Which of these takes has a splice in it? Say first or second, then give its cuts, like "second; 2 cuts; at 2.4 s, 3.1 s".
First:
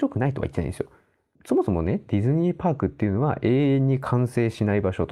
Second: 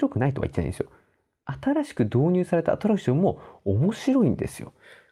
first; 1 cut; at 1.4 s